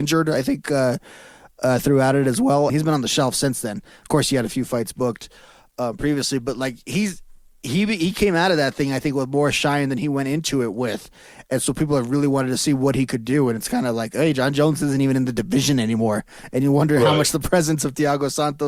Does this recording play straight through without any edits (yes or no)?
no